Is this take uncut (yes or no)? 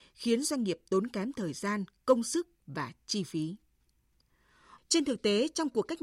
no